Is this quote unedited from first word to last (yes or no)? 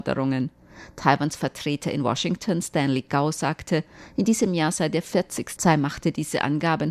no